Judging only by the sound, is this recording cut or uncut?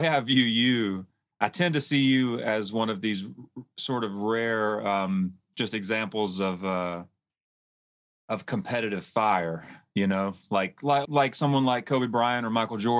cut